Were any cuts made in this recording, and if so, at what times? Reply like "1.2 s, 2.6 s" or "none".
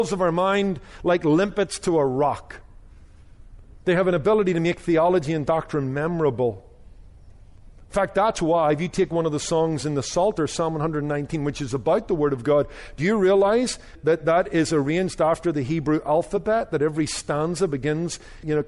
3.8 s